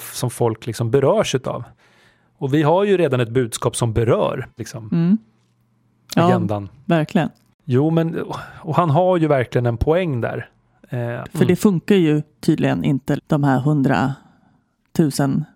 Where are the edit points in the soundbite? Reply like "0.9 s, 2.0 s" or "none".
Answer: 4.6 s, 11.2 s, 13.2 s

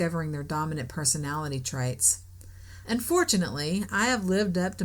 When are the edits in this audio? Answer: 2.8 s

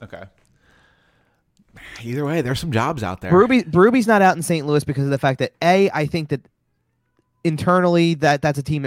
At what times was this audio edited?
none

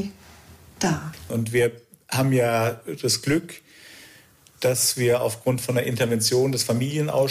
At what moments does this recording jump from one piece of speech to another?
1.3 s

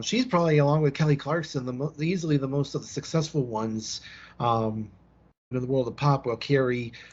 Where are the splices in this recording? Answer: 5.5 s

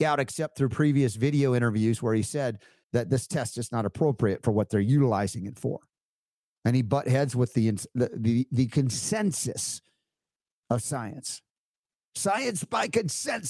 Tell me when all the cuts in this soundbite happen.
2.8 s

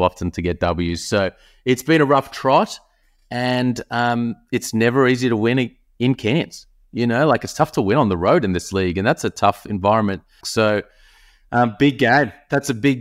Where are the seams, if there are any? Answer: 10.4 s

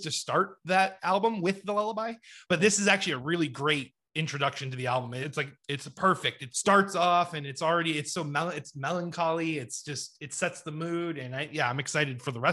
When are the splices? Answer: 5.2 s, 6.5 s

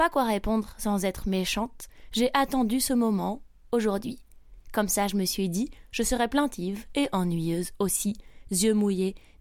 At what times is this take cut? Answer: 8.5 s

